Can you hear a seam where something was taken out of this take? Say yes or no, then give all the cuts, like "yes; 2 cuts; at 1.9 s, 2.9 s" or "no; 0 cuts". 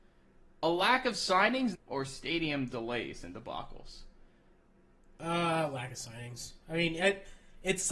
yes; 1 cut; at 1.7 s